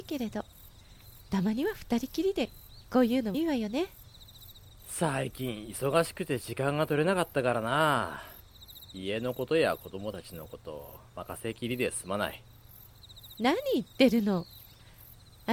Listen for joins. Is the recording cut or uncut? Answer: cut